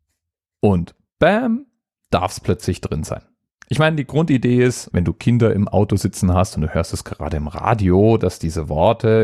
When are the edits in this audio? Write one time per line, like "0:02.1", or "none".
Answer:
0:04.9
0:08.2